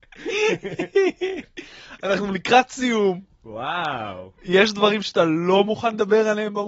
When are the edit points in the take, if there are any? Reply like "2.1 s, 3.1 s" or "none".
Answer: none